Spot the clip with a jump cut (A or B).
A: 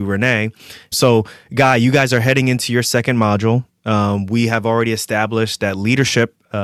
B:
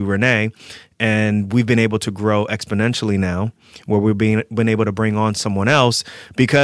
A